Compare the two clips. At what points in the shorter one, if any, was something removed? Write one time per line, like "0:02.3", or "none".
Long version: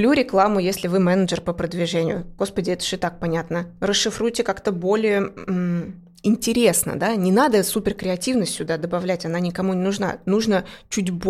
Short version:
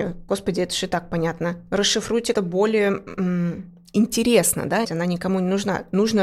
0:02.3
0:04.8

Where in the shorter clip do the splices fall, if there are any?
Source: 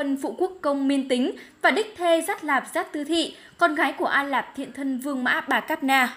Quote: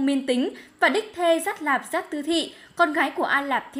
none

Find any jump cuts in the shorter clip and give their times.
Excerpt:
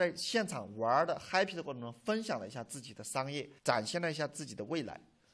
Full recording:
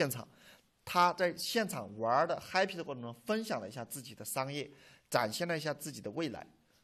0:03.6

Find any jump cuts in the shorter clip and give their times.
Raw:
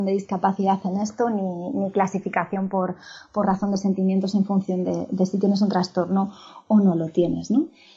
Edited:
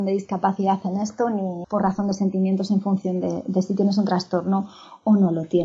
0:01.6

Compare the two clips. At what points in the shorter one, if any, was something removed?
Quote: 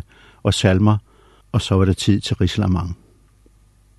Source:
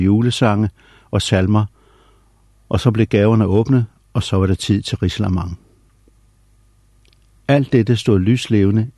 0:01.4

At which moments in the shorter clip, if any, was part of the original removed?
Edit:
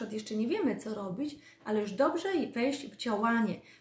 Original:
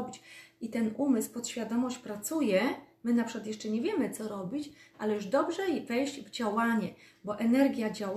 none

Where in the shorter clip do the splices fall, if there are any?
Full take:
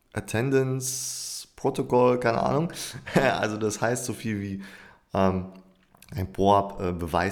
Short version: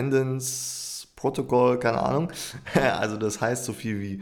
none

